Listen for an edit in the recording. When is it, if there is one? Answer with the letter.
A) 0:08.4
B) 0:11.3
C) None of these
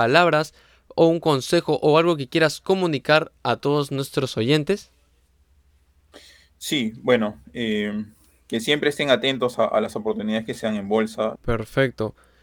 B